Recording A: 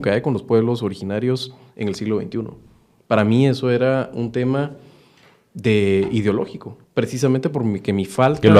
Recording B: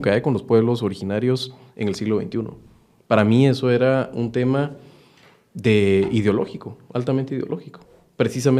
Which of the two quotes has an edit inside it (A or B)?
A